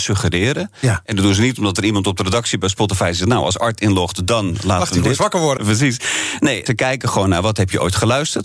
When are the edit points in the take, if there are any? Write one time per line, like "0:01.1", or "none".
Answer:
0:05.6
0:06.7